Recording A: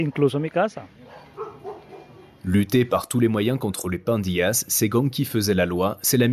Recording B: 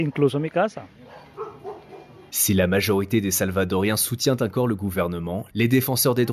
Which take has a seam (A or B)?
B